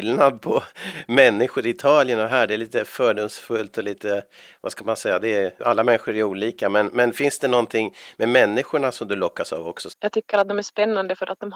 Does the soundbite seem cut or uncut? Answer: cut